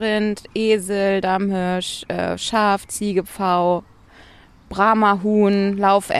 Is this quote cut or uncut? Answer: uncut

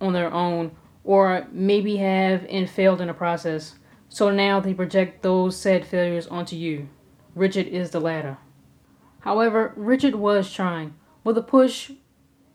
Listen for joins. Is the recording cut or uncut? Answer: uncut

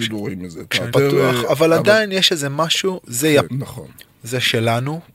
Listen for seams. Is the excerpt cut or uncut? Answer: cut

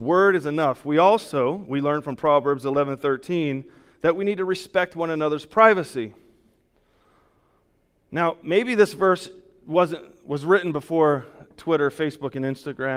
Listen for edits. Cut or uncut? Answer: uncut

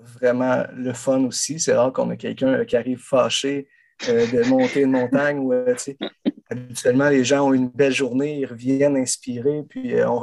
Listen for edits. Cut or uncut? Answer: uncut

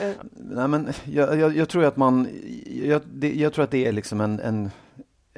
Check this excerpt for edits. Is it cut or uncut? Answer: uncut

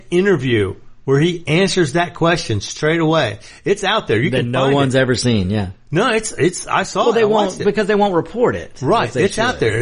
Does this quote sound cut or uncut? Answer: uncut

